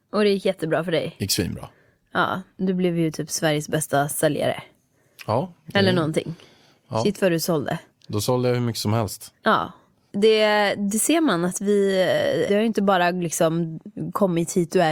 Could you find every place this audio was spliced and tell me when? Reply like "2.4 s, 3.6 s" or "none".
10.1 s, 12.5 s